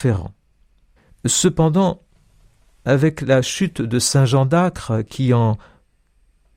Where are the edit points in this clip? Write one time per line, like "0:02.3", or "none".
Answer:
0:01.1